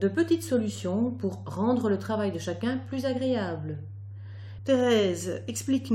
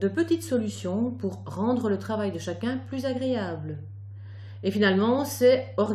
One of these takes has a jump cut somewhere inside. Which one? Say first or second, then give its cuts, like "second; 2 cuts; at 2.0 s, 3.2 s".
first; 1 cut; at 4.6 s